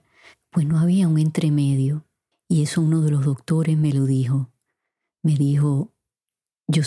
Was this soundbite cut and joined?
yes; 1 cut; at 2.3 s

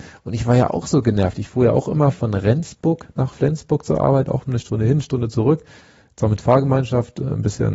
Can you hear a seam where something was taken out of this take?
no; 0 cuts

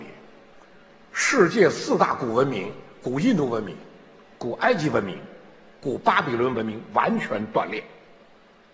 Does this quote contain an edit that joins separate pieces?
no; 0 cuts

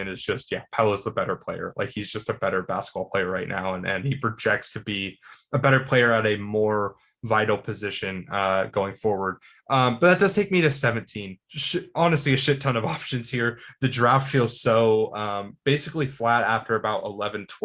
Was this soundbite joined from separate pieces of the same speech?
yes; 1 cut; at 11.4 s

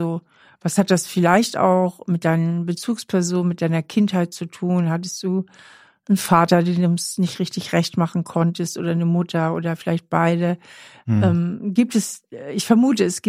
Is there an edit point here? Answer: no; 0 cuts

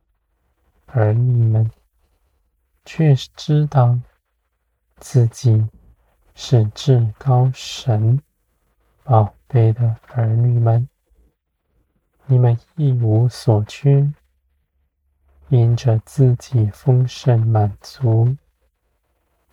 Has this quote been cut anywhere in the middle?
no; 0 cuts

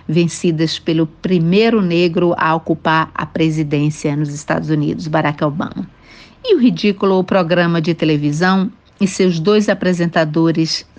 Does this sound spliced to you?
no; 0 cuts

